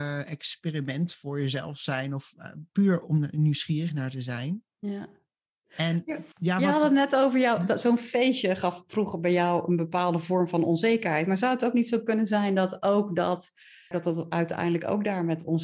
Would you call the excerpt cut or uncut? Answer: cut